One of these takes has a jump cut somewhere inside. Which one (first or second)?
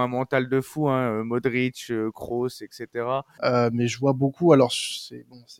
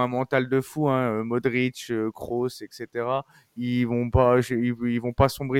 first